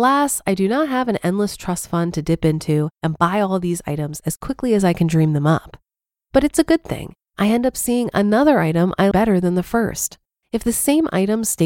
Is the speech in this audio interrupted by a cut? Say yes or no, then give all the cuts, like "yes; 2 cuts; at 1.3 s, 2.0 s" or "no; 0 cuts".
yes; 3 cuts; at 7.3 s, 9.1 s, 10.4 s